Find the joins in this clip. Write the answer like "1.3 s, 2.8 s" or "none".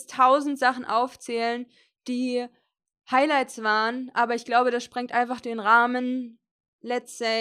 none